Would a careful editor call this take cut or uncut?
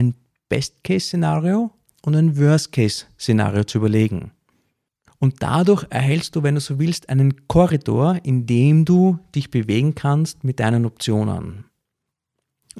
uncut